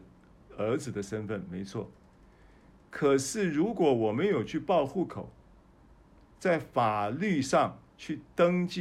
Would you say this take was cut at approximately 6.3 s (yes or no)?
yes